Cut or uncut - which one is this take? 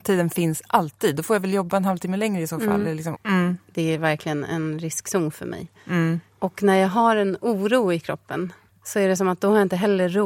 cut